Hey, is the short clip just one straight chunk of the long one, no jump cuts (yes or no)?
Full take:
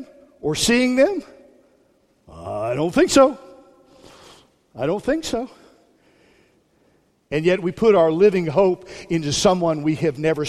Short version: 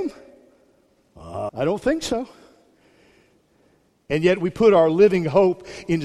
no